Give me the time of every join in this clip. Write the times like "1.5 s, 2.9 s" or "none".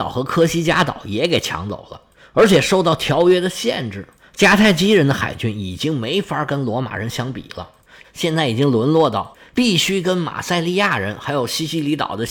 8.0 s, 11.2 s